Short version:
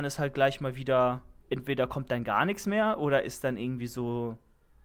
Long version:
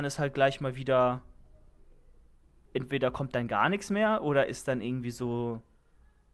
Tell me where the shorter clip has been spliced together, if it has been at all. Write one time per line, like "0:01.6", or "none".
0:01.4